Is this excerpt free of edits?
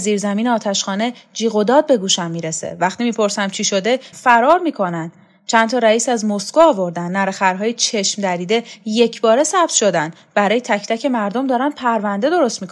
no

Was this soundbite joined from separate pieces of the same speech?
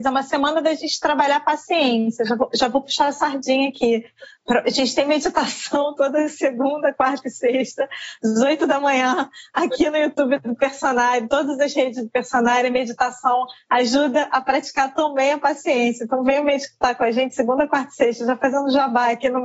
no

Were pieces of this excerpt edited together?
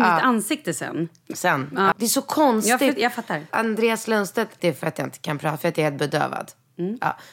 yes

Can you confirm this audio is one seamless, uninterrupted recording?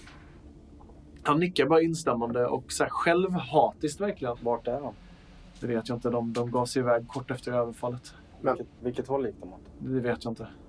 no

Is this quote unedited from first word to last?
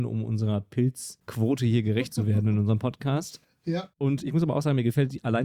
yes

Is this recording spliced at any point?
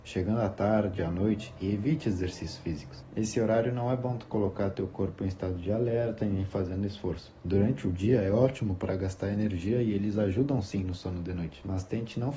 no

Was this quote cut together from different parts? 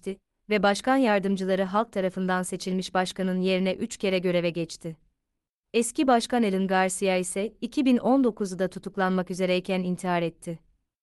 yes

